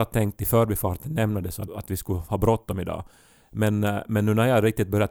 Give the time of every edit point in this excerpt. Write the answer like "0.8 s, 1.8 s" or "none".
1.7 s